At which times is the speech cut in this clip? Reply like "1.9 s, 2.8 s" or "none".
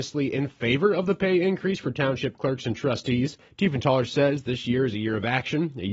3.5 s